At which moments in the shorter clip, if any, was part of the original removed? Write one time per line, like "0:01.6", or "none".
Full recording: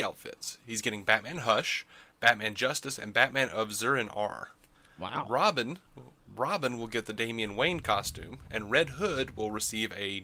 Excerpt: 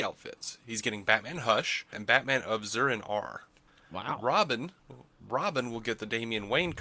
0:01.9